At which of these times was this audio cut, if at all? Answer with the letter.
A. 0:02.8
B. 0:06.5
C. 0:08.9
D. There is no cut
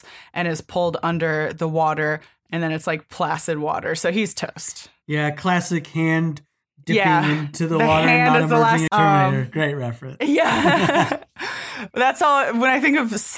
C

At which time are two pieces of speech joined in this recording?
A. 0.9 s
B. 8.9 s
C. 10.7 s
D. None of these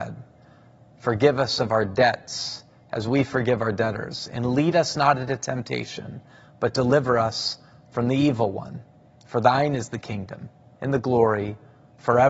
C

